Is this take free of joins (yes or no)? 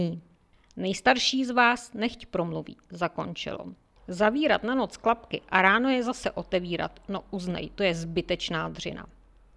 no